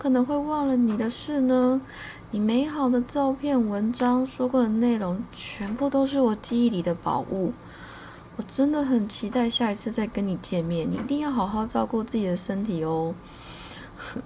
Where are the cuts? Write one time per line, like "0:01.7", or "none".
none